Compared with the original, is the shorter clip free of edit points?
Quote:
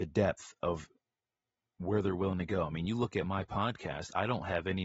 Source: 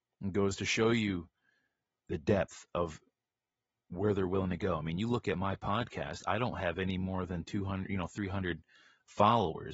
yes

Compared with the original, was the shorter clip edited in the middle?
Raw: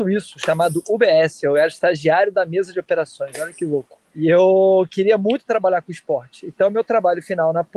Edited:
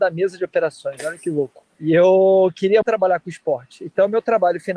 yes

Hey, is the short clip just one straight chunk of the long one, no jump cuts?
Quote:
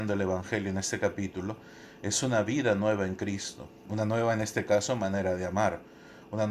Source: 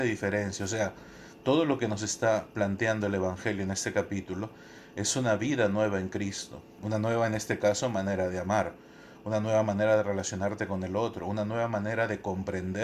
yes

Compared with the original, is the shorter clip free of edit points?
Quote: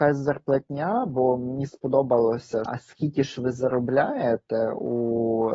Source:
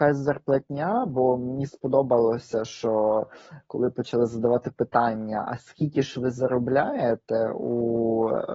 no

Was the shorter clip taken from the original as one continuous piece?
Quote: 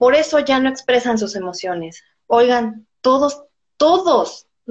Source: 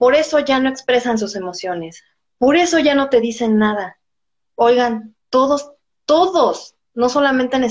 no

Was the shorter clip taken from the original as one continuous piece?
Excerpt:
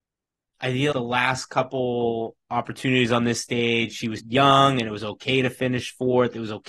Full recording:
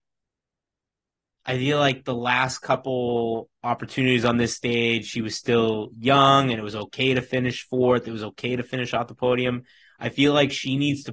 no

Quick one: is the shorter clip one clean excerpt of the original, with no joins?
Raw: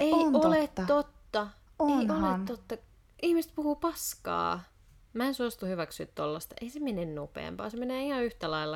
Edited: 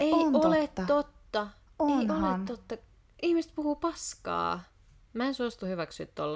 yes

